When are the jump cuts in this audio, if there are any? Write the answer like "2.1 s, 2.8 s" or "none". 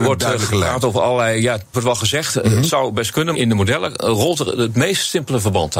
1.7 s, 3.3 s